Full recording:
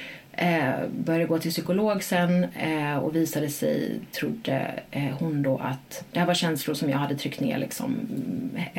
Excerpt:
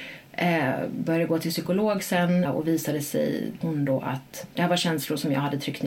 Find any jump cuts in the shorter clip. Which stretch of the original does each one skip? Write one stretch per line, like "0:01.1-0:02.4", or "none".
0:02.5-0:02.9
0:04.1-0:05.2